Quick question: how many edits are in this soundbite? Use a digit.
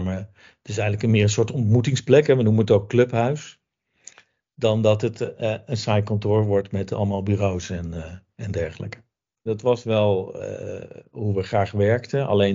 1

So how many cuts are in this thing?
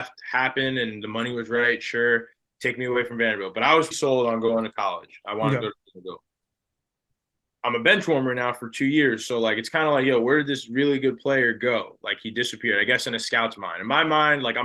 1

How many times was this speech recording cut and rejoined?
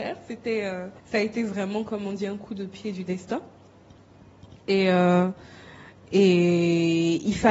1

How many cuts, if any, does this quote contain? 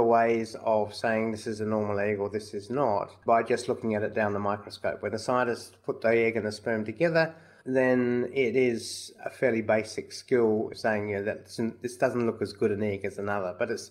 0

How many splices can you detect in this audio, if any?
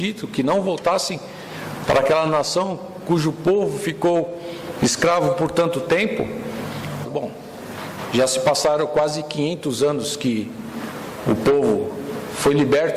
1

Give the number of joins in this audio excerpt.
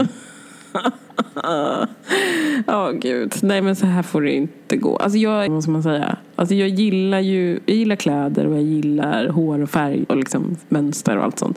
2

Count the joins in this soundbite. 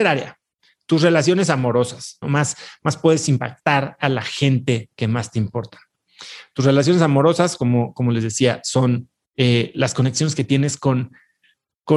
1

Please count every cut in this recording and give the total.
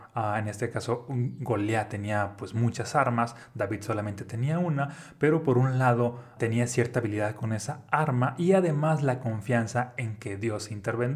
1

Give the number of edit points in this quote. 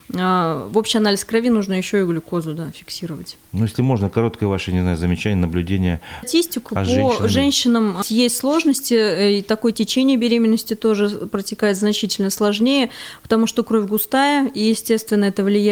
3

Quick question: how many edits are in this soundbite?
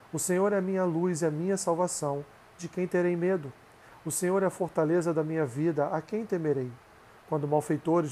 0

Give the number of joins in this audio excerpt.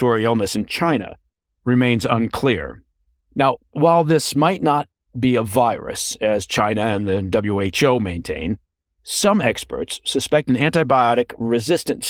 1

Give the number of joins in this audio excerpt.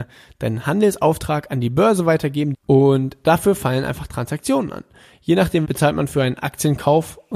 2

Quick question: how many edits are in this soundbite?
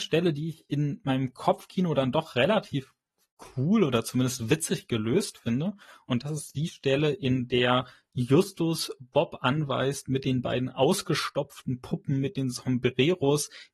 0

